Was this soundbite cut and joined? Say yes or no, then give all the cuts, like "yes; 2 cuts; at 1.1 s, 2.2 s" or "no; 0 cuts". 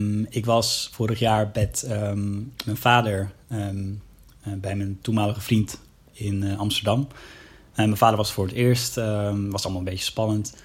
no; 0 cuts